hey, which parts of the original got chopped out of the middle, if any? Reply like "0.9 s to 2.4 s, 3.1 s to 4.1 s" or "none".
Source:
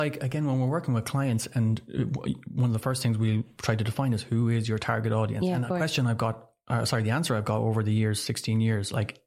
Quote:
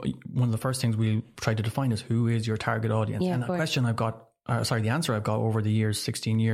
none